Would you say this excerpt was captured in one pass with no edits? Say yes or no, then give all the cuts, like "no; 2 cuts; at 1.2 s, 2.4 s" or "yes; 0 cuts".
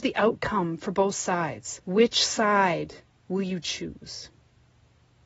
no; 1 cut; at 1.8 s